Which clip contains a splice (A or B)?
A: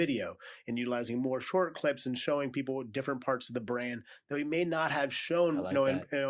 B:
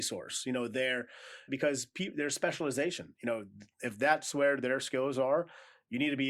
B